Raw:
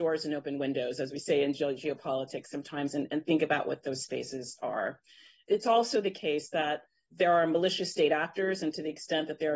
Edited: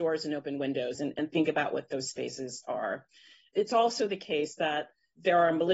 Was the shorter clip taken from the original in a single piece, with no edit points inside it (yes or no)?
no